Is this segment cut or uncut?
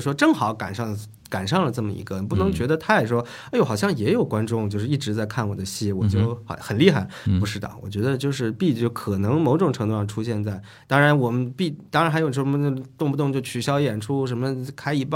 uncut